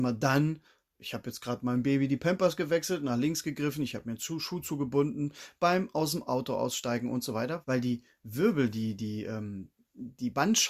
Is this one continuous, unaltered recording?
no; 1 cut; at 7.6 s

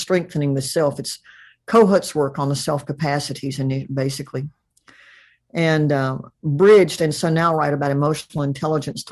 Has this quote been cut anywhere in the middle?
no; 0 cuts

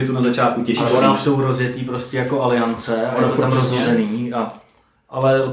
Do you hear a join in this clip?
no; 0 cuts

